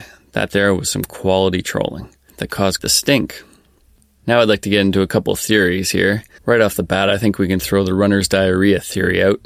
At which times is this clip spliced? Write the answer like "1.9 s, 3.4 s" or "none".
2.8 s, 6.4 s